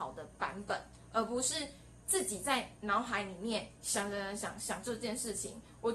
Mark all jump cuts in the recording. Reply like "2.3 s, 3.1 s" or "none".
none

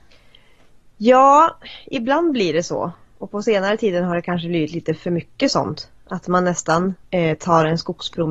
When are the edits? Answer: 7.0 s

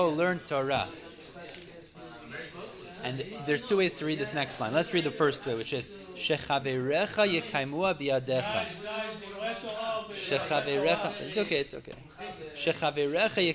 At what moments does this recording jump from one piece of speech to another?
none

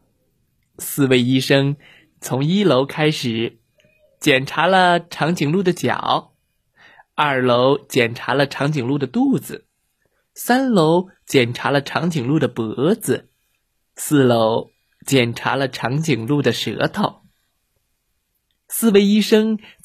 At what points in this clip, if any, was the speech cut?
none

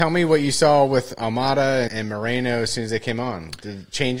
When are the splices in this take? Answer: 1.9 s

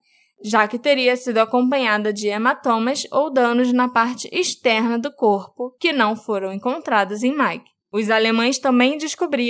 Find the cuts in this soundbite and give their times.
7.8 s

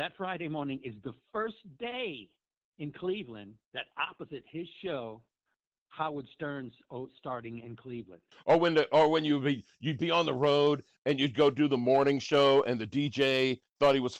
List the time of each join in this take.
3.6 s, 8.3 s

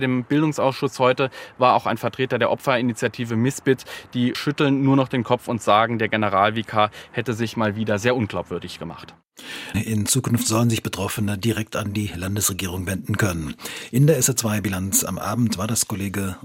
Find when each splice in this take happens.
9.7 s

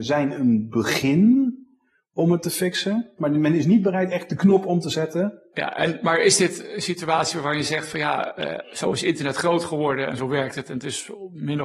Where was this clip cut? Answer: 3.2 s, 5.5 s

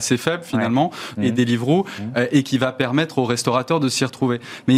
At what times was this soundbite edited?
1.2 s

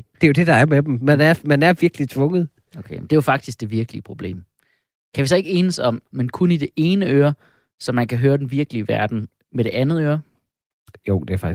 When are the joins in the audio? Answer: 6.1 s

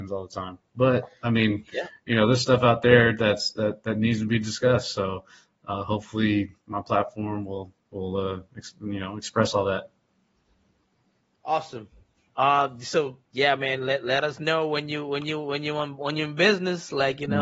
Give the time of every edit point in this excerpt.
none

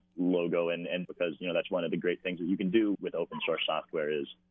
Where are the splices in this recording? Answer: 1.0 s, 2.9 s

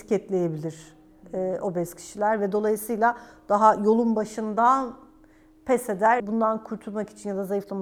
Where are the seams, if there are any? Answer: 6.2 s

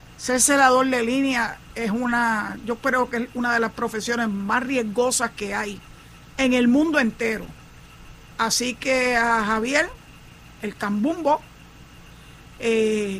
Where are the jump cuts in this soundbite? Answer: none

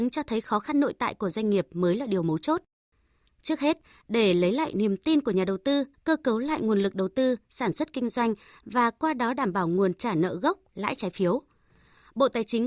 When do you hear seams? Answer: 5.9 s

